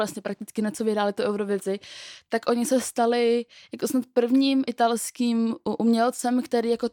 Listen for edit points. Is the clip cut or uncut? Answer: uncut